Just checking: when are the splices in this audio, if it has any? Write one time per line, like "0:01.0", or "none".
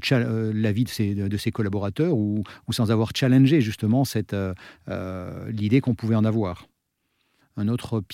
none